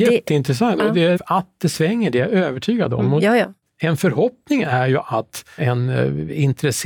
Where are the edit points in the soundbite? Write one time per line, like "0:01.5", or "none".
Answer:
0:01.2
0:05.6